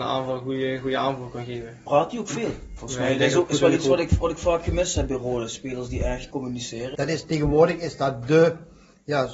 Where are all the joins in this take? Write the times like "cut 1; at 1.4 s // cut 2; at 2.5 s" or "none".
cut 1; at 2.8 s // cut 2; at 6.9 s